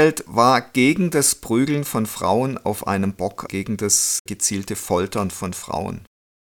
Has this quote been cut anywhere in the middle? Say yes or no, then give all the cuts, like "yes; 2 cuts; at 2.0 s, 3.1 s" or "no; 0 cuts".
yes; 1 cut; at 3.5 s